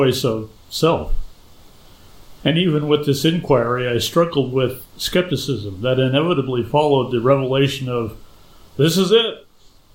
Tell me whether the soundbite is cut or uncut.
cut